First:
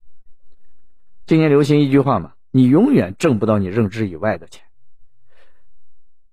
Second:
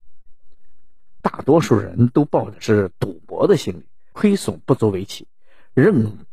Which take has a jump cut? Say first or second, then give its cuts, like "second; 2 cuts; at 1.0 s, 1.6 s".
second; 2 cuts; at 1.2 s, 4.1 s